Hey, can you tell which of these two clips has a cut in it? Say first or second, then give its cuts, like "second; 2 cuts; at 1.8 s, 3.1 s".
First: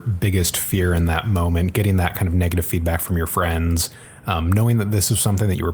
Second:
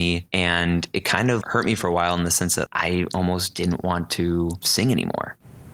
second; 2 cuts; at 1.4 s, 2.7 s